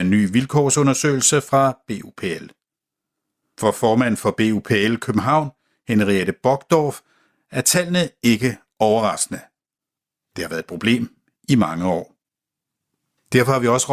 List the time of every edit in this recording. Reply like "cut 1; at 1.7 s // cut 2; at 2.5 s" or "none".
none